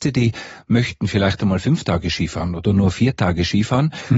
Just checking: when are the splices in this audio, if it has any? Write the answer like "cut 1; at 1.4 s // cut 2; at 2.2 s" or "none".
none